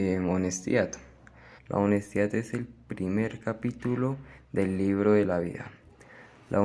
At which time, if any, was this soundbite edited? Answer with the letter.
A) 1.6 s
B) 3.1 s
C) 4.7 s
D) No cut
A